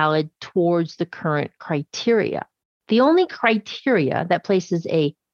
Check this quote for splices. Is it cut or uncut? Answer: uncut